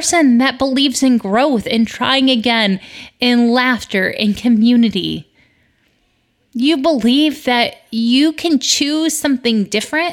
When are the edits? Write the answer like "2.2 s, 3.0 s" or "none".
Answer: none